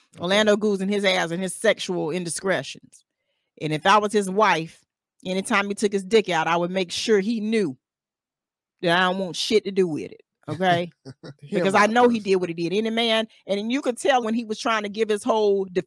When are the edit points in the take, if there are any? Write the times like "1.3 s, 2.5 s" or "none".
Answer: 11.4 s, 14.2 s